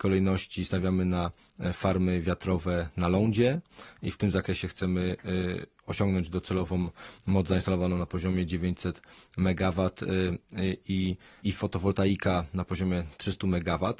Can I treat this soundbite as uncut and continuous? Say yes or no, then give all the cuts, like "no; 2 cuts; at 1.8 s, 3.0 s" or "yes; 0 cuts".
no; 1 cut; at 11.4 s